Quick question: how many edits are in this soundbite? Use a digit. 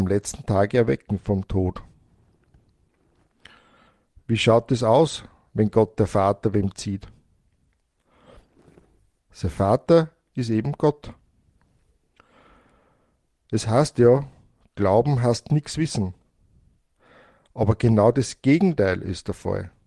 1